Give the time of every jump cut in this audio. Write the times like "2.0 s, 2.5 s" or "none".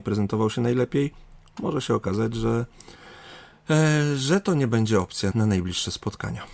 5.3 s